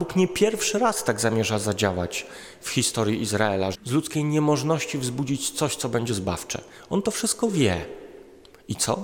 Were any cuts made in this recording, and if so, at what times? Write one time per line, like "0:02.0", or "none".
0:03.7